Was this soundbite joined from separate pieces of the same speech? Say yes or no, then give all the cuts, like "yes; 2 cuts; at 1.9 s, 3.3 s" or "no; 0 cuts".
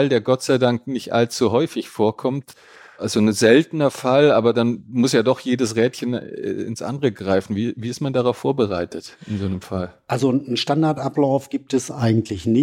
no; 0 cuts